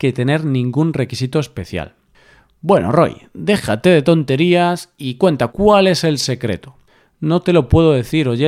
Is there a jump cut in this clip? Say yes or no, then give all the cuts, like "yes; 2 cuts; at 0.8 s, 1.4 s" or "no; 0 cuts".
yes; 1 cut; at 5.5 s